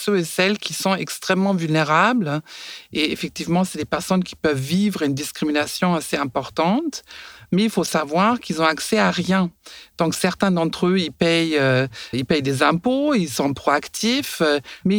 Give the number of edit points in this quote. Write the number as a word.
two